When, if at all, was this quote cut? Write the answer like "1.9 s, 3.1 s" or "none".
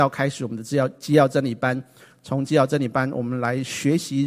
2.1 s